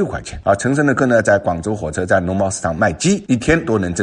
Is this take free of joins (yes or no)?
no